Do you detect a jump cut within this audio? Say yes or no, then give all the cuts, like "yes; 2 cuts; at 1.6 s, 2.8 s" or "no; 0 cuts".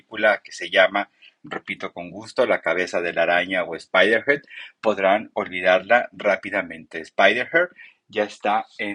no; 0 cuts